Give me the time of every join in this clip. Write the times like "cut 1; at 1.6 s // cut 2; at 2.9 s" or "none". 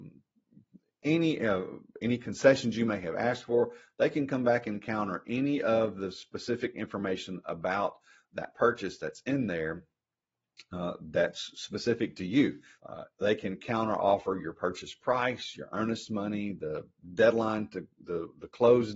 cut 1; at 12.8 s